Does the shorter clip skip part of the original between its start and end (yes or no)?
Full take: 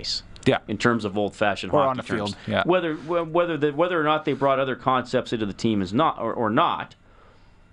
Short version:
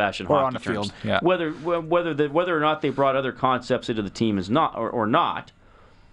no